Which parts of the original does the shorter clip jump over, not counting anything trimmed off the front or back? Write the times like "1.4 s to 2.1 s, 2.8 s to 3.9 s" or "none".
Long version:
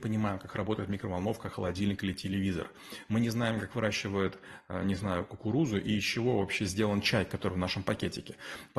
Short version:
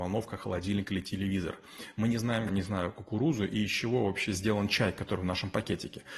3.6 s to 4.8 s